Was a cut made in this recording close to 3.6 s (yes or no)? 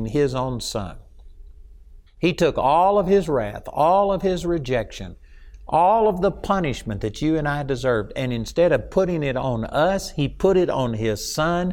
no